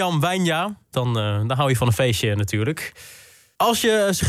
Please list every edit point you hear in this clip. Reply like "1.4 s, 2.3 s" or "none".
0.9 s